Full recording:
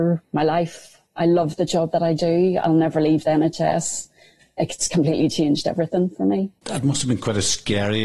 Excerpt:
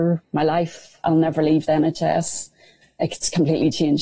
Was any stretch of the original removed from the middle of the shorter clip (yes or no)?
yes